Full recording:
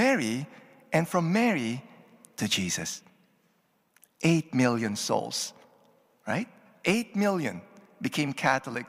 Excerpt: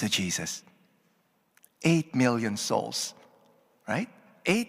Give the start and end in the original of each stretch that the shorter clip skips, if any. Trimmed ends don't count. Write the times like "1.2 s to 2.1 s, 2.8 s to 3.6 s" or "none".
none

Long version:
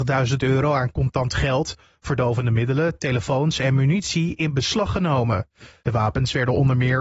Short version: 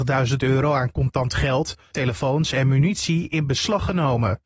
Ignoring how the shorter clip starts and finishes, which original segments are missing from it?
1.9 s to 3.0 s

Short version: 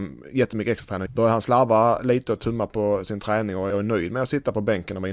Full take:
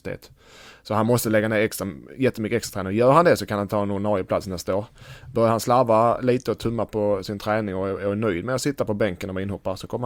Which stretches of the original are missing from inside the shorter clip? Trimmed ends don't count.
2.9 s to 5.2 s, 7.9 s to 8.0 s

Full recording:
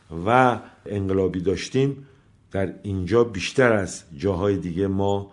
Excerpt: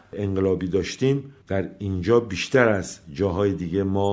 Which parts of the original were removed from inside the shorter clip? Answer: 2.1 s to 2.5 s

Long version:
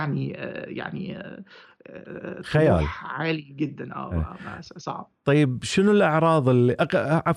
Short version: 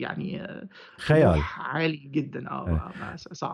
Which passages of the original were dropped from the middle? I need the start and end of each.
1.7 s to 2.4 s

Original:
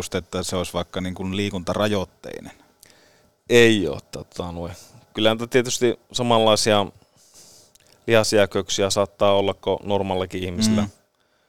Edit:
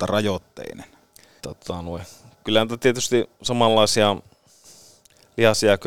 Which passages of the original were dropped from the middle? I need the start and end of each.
3.1 s to 4.1 s

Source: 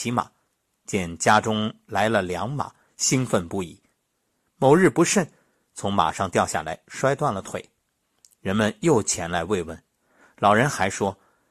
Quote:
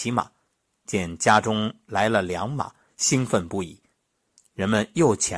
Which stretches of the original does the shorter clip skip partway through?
4.4 s to 8.2 s

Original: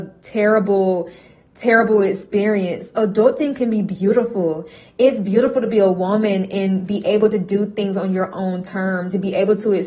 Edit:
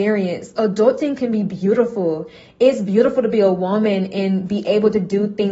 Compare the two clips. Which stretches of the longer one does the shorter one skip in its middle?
none

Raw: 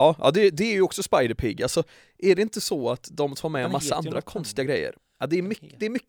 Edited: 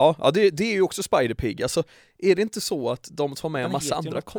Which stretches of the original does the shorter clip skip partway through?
none

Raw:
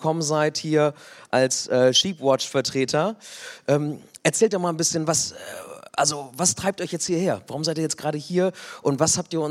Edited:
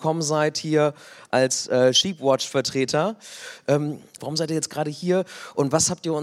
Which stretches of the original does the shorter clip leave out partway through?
4.2 s to 7.5 s

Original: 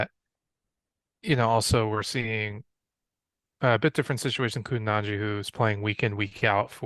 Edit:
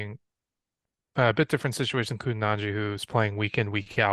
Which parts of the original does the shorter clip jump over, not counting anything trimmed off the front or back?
none

